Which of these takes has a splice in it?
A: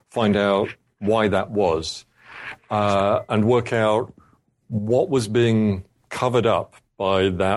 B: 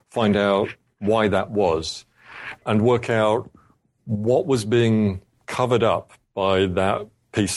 B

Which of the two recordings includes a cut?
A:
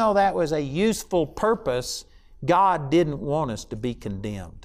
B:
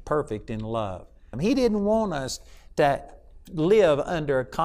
B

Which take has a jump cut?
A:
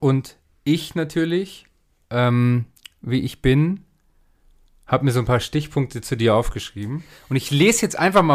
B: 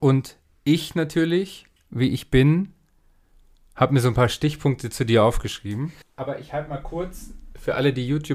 B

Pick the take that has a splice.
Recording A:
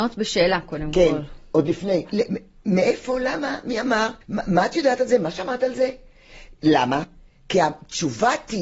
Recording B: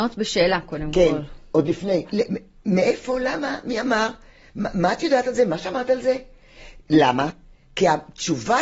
A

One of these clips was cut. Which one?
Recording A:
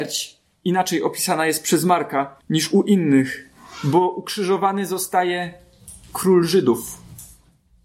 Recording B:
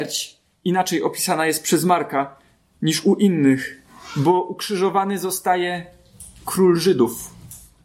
A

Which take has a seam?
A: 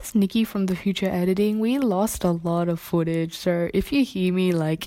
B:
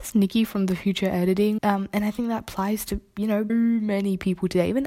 B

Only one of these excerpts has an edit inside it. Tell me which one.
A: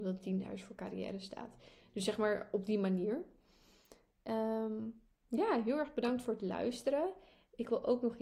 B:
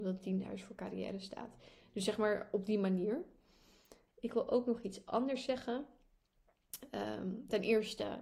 B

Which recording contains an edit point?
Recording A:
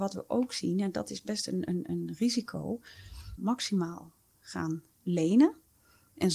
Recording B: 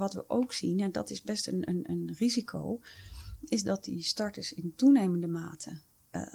A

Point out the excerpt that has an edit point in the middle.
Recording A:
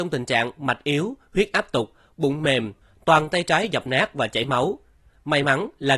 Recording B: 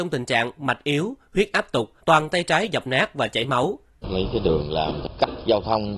B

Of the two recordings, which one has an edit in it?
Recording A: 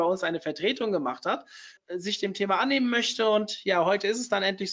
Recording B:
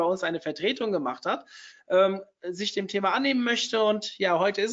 A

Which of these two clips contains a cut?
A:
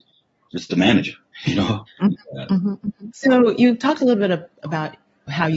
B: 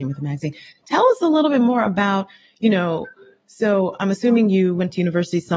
A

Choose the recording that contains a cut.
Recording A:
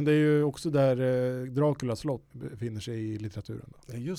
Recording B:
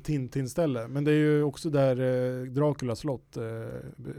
A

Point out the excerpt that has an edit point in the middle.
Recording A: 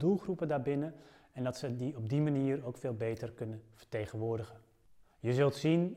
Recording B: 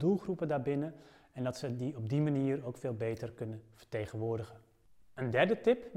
A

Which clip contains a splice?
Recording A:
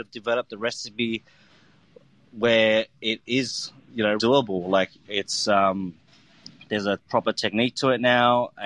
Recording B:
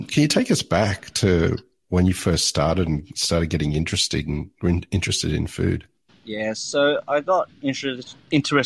A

